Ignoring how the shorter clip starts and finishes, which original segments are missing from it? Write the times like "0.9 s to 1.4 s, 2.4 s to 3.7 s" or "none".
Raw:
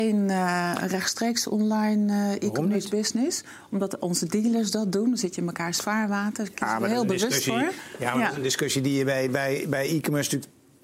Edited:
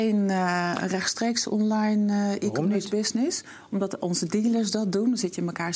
none